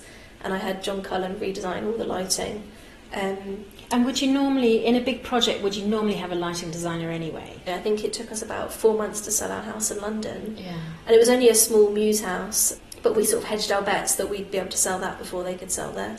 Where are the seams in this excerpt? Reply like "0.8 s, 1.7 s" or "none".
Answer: 7.7 s